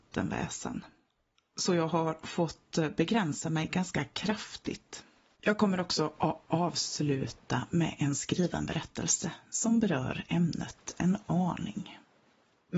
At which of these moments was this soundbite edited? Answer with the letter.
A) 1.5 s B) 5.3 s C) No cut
B